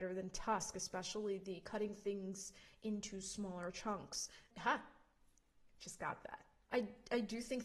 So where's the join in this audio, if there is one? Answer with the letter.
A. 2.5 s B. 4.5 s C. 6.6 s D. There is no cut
B